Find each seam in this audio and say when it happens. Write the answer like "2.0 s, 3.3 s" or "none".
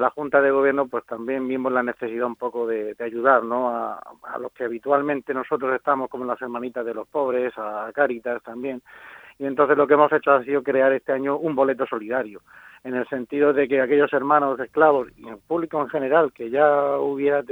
none